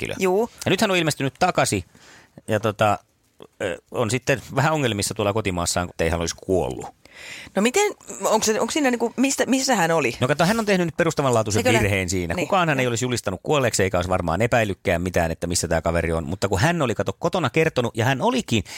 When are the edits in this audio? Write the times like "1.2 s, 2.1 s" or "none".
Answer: 5.9 s